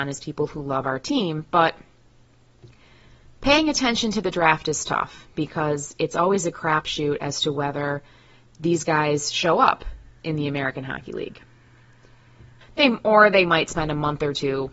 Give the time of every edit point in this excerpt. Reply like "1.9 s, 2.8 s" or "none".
12.6 s